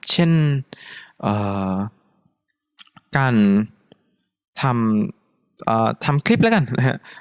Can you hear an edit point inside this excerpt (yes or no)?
no